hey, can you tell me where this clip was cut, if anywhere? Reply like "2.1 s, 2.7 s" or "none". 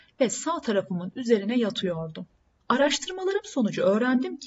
2.6 s